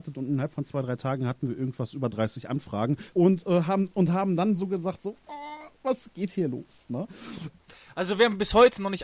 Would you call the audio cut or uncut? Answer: cut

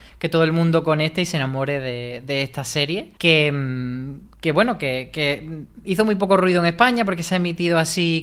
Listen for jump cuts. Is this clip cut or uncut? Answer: cut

